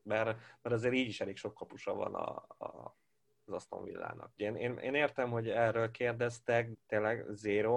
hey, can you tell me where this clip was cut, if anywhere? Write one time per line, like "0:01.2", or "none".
0:04.4
0:06.7